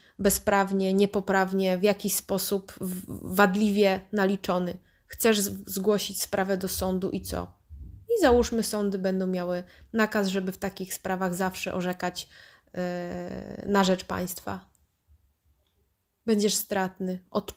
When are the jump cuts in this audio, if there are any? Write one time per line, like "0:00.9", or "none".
none